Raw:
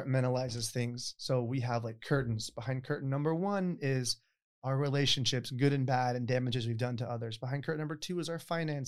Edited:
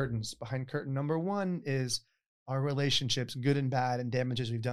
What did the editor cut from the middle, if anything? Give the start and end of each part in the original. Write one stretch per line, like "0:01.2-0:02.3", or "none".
none